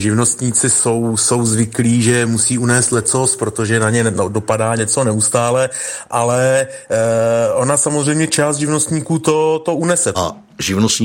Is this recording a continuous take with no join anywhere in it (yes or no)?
no